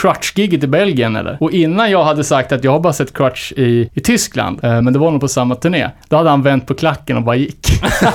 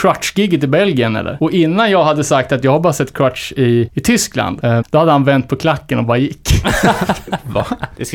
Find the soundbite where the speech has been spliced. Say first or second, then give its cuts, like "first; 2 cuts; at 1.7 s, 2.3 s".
second; 1 cut; at 4.8 s